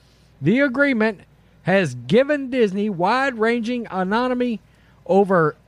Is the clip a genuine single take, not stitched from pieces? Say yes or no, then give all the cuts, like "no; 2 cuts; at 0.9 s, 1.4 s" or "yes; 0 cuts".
yes; 0 cuts